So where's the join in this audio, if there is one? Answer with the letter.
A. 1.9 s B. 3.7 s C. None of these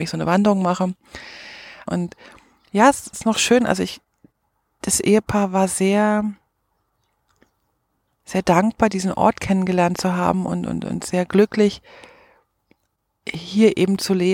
A